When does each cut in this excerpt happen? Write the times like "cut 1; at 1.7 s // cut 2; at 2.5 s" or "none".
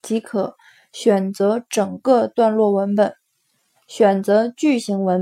cut 1; at 3.8 s